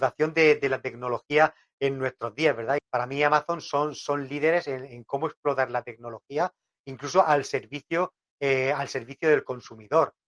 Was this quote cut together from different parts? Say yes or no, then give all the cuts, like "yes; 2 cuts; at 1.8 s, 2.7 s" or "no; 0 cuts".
yes; 1 cut; at 2.8 s